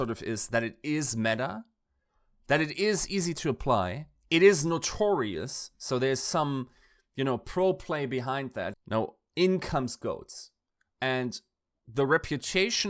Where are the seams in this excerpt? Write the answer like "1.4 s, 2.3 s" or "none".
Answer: 8.7 s